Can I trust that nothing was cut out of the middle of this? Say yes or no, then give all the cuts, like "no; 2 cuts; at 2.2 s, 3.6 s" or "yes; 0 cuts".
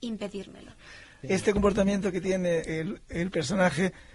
no; 2 cuts; at 1.2 s, 2.6 s